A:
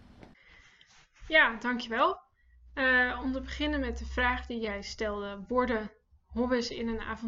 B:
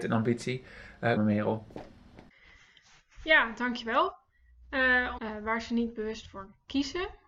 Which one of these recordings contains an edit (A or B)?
B